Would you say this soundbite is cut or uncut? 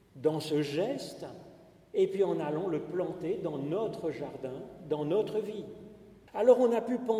cut